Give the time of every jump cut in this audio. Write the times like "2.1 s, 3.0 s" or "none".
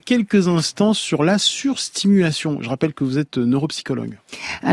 none